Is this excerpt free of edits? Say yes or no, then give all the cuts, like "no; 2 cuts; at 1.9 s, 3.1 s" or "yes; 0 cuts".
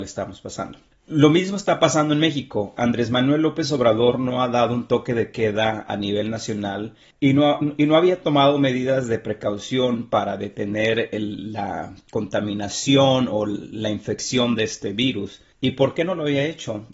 yes; 0 cuts